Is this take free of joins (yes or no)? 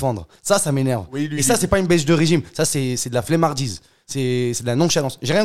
yes